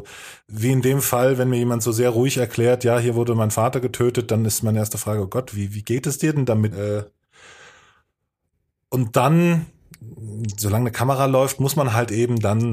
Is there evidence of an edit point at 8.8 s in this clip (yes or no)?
no